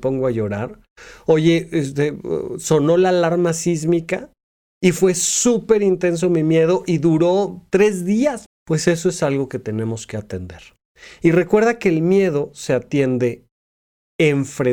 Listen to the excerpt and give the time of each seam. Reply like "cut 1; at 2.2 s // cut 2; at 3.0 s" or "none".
cut 1; at 8.5 s